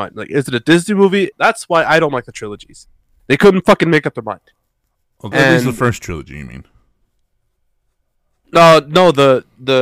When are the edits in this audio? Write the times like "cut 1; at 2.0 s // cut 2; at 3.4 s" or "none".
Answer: cut 1; at 1.3 s // cut 2; at 5.3 s